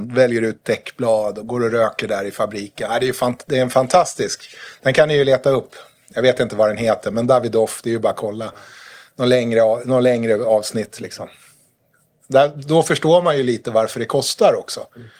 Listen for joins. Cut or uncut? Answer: uncut